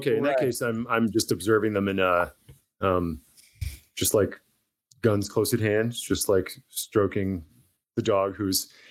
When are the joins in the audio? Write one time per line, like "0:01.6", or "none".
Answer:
none